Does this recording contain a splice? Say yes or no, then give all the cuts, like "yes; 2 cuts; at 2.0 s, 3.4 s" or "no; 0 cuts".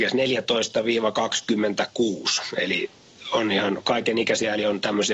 no; 0 cuts